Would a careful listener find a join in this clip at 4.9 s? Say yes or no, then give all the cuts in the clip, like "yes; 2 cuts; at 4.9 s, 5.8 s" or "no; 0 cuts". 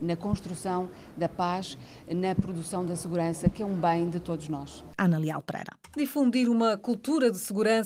yes; 1 cut; at 4.9 s